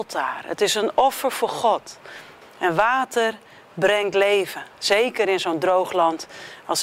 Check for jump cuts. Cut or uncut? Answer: cut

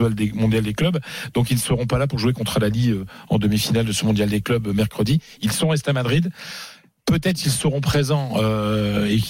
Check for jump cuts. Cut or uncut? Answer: uncut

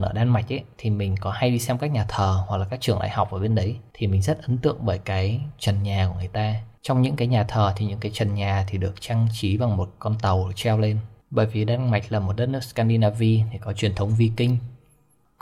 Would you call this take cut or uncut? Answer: uncut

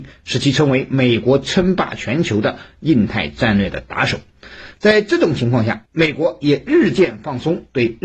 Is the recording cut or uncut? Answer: uncut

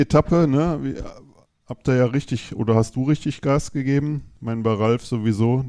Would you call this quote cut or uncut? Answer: uncut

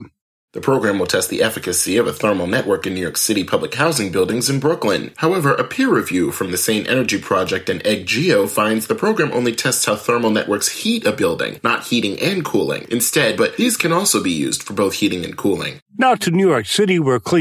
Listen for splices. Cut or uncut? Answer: cut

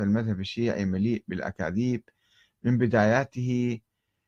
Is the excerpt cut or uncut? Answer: uncut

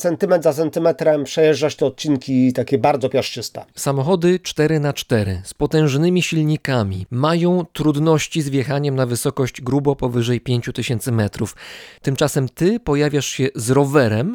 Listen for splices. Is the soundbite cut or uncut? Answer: cut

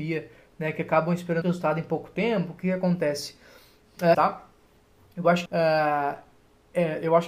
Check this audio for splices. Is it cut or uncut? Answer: cut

